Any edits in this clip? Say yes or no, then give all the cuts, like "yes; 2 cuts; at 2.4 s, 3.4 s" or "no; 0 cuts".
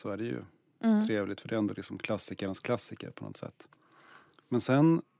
no; 0 cuts